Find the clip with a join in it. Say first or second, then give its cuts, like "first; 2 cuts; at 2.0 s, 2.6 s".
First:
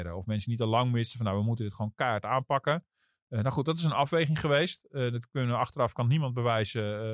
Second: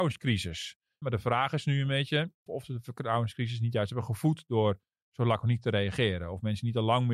second; 2 cuts; at 1.0 s, 2.5 s